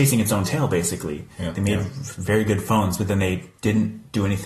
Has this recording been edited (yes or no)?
yes